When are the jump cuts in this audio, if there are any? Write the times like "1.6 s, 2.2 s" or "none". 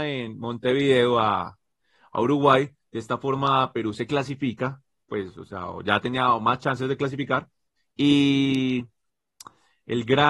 none